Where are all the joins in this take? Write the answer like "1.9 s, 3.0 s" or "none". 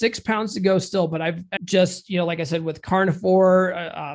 1.6 s